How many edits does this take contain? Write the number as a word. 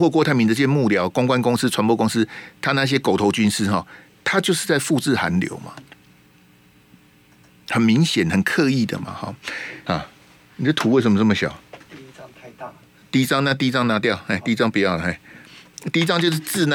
one